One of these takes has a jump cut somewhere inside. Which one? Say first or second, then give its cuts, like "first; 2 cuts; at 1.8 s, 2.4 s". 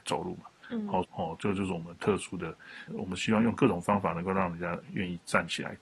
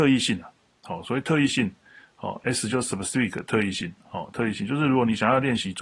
first; 2 cuts; at 1.0 s, 2.9 s